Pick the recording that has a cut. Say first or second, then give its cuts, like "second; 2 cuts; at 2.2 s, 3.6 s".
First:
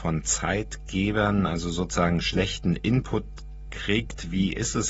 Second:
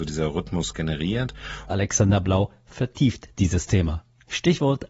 second; 1 cut; at 1.7 s